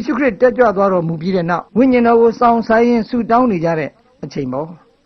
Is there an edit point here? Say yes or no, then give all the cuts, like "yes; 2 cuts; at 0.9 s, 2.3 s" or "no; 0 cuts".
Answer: yes; 1 cut; at 1.7 s